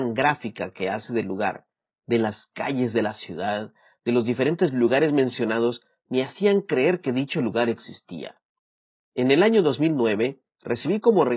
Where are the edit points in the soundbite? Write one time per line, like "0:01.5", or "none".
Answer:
0:09.1